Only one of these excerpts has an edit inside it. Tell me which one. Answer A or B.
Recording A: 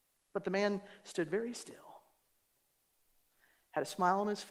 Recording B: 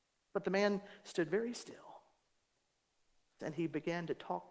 B